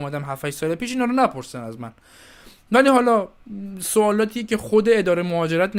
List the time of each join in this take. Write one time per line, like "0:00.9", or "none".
none